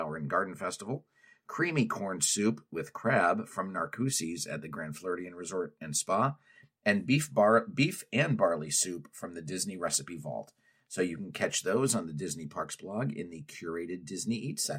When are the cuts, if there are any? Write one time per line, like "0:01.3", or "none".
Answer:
none